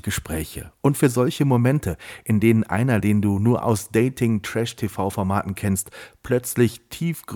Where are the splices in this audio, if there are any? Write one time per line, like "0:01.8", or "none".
none